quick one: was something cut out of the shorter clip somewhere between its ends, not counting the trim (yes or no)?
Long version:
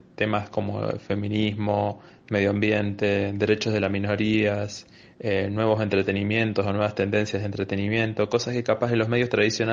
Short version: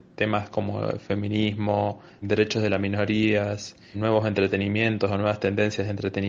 yes